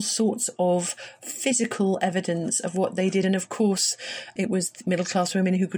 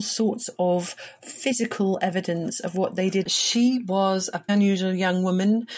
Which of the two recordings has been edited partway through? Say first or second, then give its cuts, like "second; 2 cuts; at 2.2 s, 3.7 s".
second; 2 cuts; at 3.2 s, 4.5 s